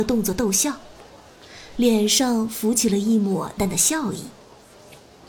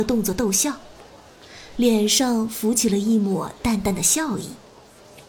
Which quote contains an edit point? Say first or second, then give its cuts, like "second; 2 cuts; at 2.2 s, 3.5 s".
first; 1 cut; at 3.6 s